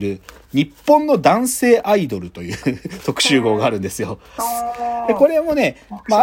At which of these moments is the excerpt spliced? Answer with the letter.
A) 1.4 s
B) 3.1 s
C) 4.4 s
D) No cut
C